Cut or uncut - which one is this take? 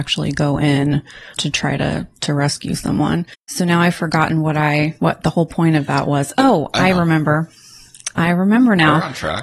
cut